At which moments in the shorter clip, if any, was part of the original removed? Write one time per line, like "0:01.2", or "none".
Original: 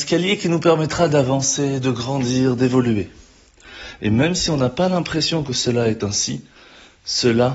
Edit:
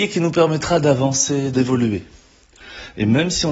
0:01.5